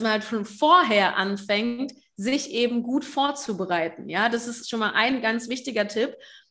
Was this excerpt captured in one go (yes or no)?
yes